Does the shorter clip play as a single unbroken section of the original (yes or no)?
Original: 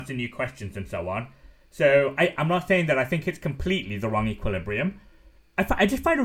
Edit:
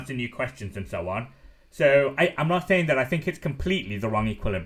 yes